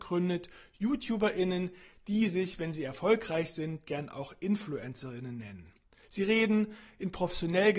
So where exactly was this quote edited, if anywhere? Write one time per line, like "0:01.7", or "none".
none